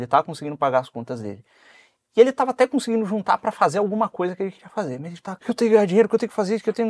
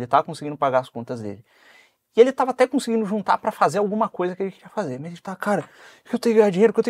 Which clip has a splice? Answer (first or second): first